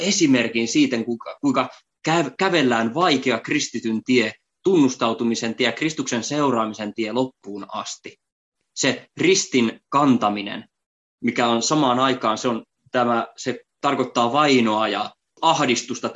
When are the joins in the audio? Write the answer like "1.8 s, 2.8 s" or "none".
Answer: none